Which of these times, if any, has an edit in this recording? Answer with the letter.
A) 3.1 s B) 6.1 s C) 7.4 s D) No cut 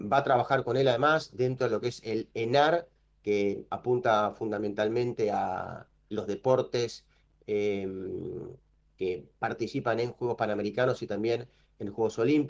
B